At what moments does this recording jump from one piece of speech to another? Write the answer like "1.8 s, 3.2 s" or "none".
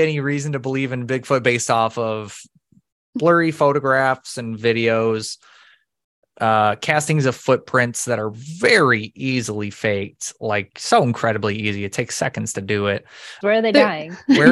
13.4 s